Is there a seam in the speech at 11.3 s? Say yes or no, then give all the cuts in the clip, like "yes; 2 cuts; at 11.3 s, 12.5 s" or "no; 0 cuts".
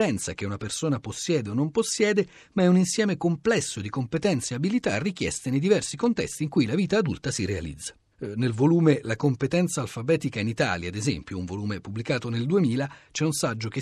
no; 1 cut; at 8.1 s